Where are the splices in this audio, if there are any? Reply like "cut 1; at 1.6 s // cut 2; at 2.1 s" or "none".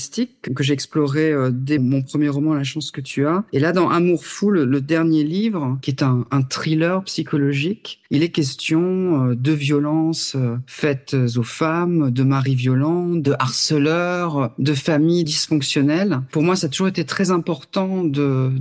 cut 1; at 1.8 s